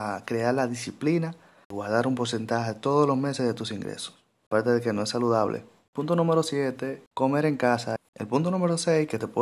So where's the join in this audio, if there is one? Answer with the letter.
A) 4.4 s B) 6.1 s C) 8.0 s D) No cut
C